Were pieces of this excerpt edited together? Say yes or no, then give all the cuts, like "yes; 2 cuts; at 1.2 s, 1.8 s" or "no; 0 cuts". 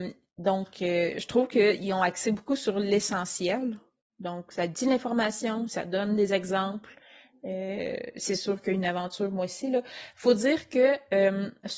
no; 0 cuts